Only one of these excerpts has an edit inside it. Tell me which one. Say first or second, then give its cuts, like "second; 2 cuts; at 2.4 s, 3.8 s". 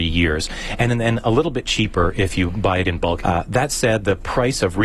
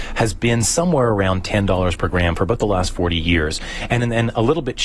first; 1 cut; at 3.2 s